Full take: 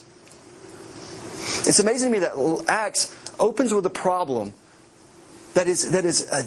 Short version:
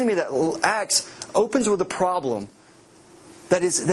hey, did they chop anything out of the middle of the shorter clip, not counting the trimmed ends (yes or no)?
no